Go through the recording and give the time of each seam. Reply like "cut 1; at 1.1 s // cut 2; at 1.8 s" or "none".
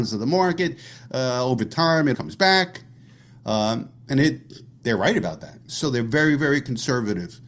cut 1; at 2.1 s // cut 2; at 5.7 s